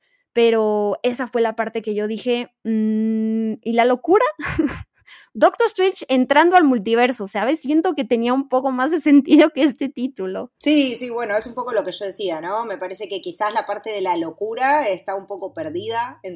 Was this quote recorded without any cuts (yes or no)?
yes